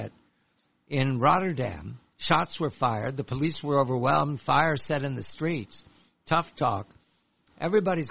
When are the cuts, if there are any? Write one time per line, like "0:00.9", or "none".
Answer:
none